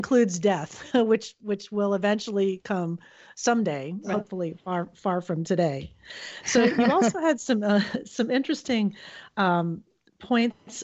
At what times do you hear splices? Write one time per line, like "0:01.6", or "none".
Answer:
none